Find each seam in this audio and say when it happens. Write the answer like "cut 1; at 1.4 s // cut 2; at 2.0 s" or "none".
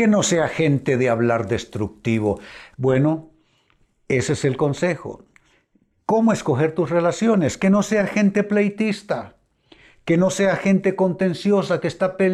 cut 1; at 2.7 s